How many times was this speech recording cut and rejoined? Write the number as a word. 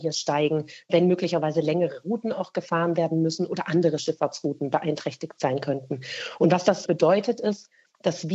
one